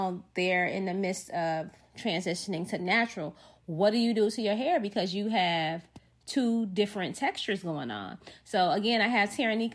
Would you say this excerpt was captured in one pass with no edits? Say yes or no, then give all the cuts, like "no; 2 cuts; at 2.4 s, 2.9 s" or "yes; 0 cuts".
yes; 0 cuts